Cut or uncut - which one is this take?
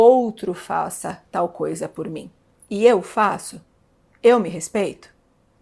uncut